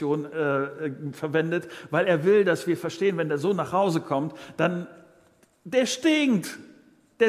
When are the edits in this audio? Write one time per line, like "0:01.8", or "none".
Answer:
none